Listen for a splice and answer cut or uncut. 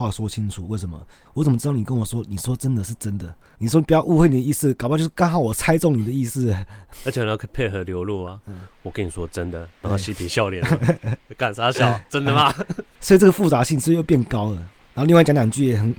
cut